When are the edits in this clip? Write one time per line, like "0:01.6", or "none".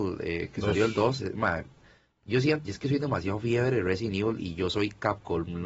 0:02.6

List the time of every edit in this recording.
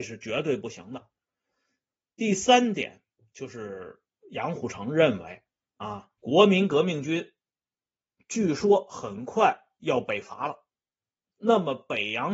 0:06.2

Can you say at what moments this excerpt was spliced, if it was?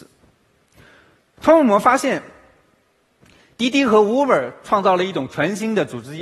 none

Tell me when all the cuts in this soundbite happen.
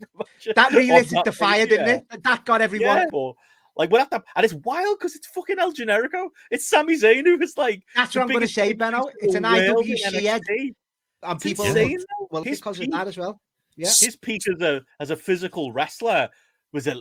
0:03.1
0:12.4

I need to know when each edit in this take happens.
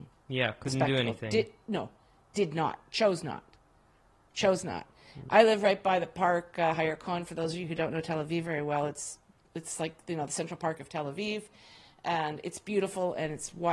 none

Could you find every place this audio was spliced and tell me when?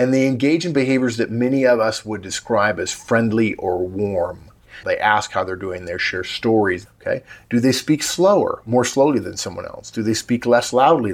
0:04.8
0:06.9

